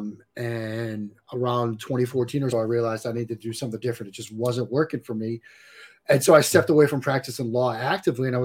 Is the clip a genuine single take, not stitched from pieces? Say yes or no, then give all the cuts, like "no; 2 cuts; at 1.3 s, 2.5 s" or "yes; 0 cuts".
no; 1 cut; at 2.5 s